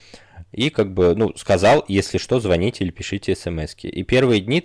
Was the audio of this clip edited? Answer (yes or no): no